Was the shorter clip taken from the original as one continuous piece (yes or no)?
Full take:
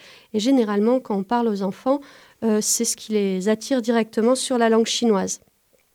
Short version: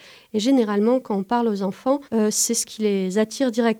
no